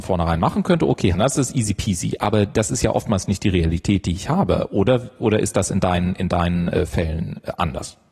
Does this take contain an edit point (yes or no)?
yes